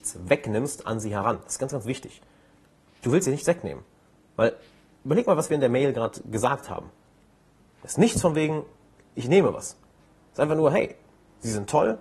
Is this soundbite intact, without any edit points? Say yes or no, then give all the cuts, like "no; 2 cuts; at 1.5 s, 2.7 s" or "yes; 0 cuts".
yes; 0 cuts